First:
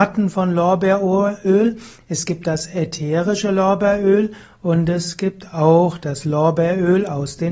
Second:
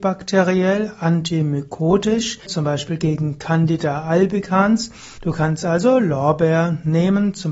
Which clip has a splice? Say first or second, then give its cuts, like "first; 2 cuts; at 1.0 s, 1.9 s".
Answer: second; 2 cuts; at 2.5 s, 5.2 s